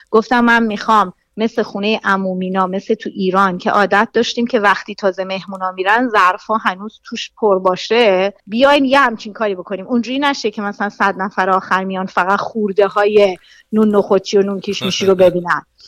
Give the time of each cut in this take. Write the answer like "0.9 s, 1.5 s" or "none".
8.4 s